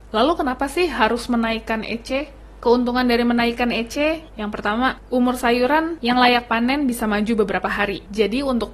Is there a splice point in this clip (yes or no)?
no